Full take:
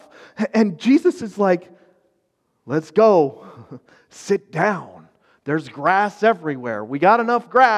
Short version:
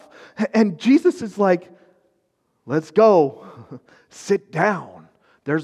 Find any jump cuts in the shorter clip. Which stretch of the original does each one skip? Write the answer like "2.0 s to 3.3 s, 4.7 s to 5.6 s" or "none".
none